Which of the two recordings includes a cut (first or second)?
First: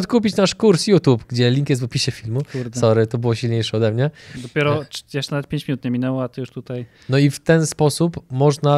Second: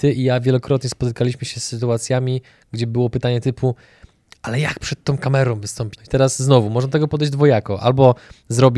second